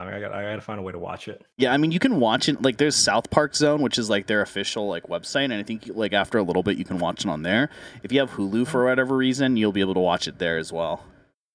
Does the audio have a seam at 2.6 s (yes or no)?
no